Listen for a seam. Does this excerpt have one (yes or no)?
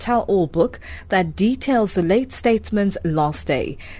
no